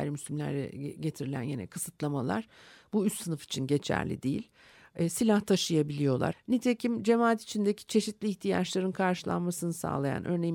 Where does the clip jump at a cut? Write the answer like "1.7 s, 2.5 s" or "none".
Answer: 6.3 s